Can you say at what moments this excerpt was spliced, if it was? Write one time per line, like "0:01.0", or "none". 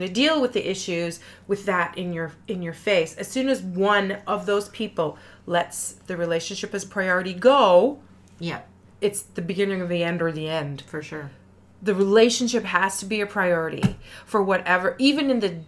none